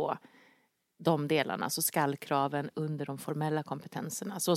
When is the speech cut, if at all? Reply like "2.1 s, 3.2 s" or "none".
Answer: none